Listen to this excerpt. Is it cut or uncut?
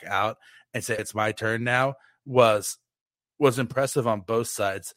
cut